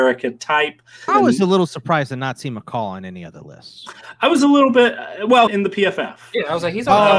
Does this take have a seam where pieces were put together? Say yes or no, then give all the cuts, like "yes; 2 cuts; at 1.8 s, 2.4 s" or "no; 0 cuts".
yes; 2 cuts; at 1.1 s, 5.5 s